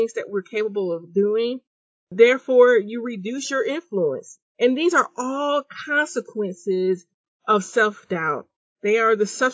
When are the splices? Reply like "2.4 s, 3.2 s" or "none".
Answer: 4.4 s